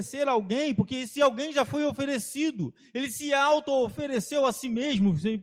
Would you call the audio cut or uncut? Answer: uncut